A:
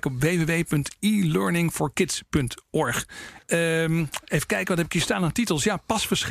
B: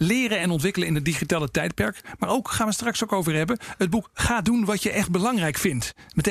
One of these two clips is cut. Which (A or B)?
A